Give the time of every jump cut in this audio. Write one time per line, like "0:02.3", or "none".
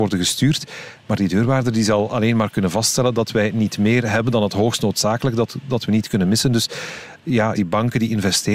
0:07.6